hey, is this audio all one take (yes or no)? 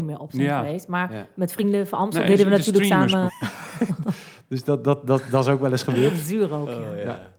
no